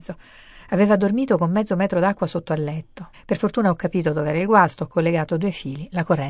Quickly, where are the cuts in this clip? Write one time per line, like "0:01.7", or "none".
0:03.1